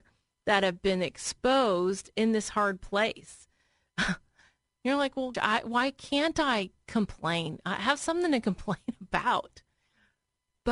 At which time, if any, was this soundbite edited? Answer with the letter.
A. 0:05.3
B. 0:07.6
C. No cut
A